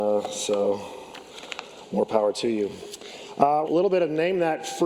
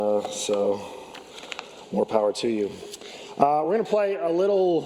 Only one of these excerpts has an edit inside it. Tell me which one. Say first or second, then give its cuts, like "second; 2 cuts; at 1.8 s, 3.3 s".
first; 1 cut; at 3.6 s